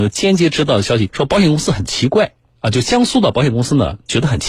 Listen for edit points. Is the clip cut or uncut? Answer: cut